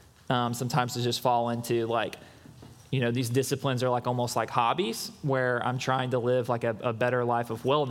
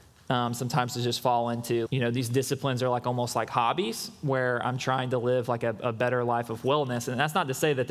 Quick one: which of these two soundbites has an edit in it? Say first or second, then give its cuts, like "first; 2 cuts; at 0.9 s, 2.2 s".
second; 1 cut; at 1.9 s